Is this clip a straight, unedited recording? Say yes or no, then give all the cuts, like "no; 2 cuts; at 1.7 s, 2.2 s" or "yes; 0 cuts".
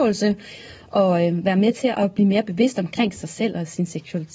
yes; 0 cuts